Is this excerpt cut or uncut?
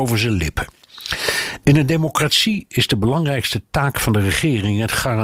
uncut